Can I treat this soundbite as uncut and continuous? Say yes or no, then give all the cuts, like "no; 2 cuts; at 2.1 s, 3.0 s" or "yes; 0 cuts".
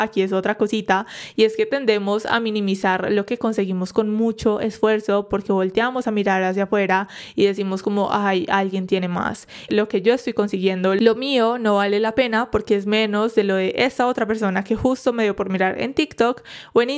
no; 1 cut; at 9.7 s